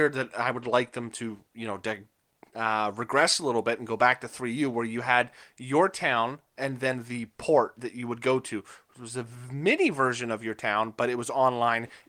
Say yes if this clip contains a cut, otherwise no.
no